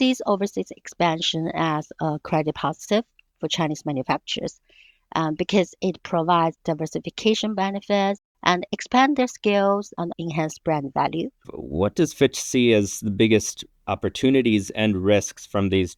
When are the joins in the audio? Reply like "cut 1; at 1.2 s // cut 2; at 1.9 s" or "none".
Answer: cut 1; at 10.1 s // cut 2; at 11.4 s